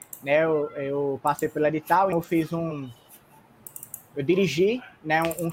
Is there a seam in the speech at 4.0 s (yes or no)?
no